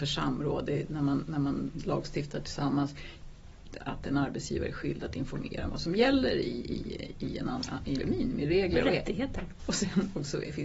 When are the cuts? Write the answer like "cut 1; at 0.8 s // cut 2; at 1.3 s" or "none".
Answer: cut 1; at 3.8 s // cut 2; at 8.0 s // cut 3; at 9.6 s